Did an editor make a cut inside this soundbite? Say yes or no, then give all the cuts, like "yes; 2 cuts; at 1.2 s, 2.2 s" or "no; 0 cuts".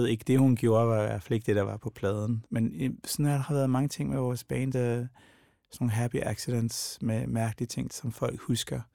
yes; 3 cuts; at 2.5 s, 4.7 s, 7.9 s